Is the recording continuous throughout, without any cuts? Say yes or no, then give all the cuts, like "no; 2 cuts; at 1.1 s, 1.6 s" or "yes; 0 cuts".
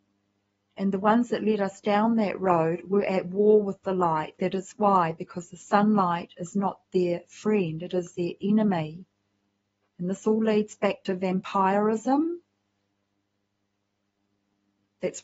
yes; 0 cuts